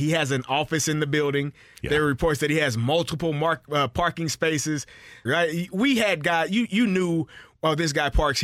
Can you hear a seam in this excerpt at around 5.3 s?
yes; 1 cut; at 5.3 s

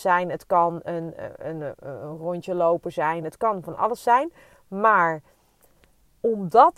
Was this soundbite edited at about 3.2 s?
yes; 1 cut; at 3.2 s

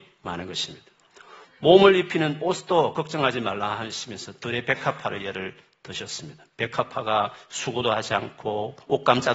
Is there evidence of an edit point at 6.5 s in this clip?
no; 0 cuts

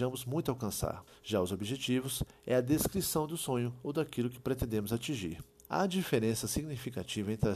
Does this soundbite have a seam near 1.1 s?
yes; 2 cuts; at 1.1 s, 5.7 s

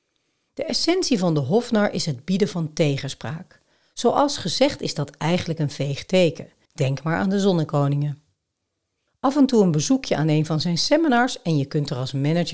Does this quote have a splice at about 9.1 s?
yes; 2 cuts; at 6.7 s, 9.1 s

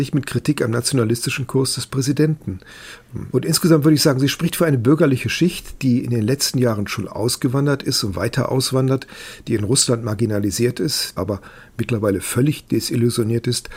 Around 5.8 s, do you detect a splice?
no; 2 cuts; at 3.3 s, 11.2 s

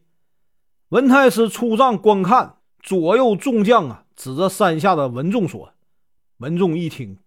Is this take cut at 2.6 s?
yes; 2 cuts; at 2.6 s, 6.2 s

